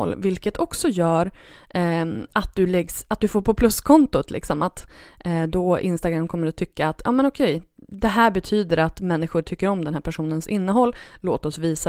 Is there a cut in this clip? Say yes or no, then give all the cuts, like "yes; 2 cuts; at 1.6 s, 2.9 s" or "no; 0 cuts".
no; 0 cuts